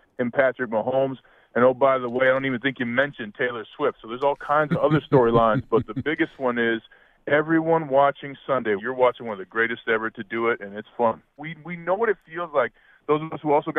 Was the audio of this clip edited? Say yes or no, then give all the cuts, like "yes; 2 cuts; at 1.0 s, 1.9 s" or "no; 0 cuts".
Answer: yes; 2 cuts; at 8.8 s, 11.4 s